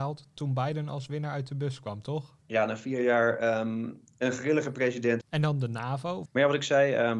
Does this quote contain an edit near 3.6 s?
no; 3 cuts; at 2.4 s, 5.2 s, 6.3 s

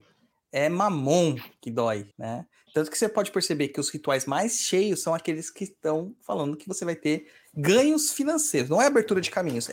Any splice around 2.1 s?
yes; 1 cut; at 2.1 s

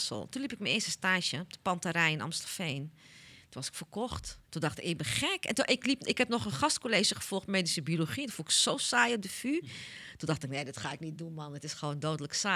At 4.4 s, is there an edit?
yes; 1 cut; at 4.4 s

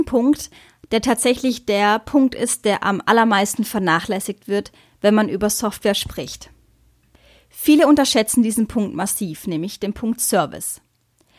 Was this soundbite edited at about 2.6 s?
no; 0 cuts

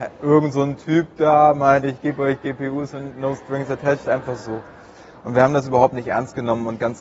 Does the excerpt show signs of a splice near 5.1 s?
no; 1 cut; at 1.8 s

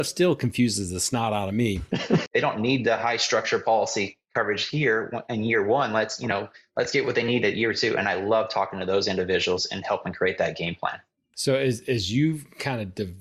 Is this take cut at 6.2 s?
no; 1 cut; at 2.3 s

